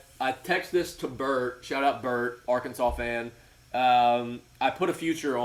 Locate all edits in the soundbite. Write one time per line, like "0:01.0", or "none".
none

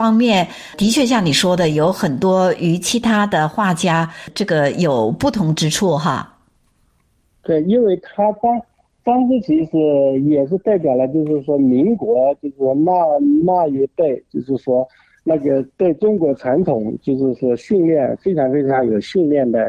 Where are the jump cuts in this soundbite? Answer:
none

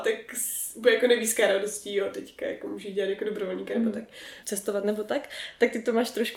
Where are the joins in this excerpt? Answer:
0:04.4

